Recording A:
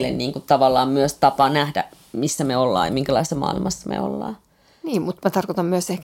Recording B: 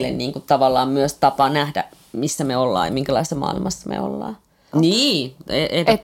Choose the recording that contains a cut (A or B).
B